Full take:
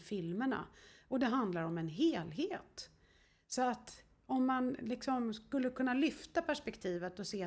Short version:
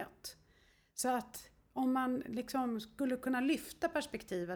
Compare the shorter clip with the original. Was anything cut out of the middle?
no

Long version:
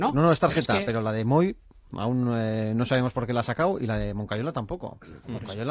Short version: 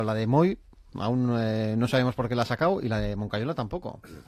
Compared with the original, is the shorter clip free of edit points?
yes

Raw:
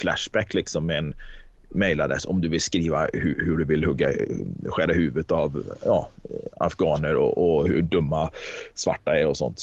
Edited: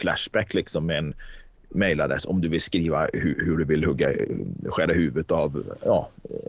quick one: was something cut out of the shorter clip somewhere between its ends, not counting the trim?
no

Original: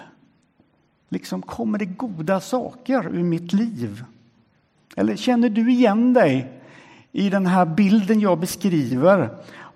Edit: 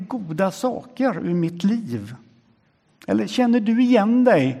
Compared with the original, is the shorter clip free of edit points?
yes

